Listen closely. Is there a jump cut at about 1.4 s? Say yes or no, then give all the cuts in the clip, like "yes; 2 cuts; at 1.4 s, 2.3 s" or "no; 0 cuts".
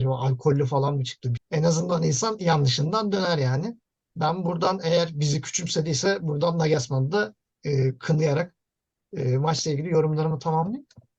yes; 1 cut; at 1.4 s